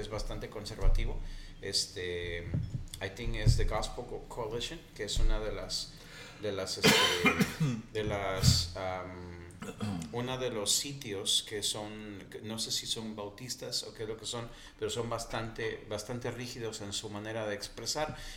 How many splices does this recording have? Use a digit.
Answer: 0